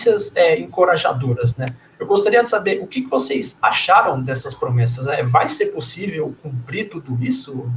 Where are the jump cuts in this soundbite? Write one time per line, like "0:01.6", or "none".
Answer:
none